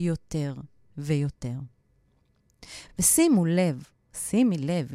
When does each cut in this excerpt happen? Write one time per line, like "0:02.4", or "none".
none